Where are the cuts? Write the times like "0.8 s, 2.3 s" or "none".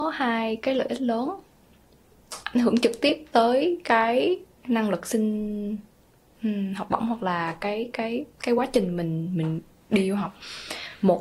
none